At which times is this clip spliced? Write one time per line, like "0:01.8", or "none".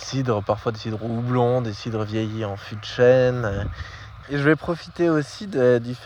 0:04.2